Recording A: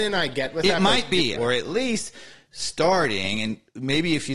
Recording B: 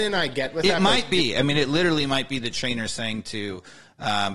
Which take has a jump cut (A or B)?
A